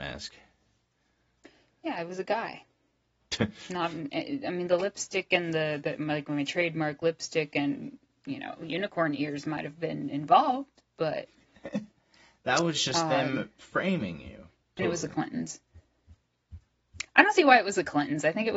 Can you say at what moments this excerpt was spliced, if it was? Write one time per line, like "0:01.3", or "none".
0:14.6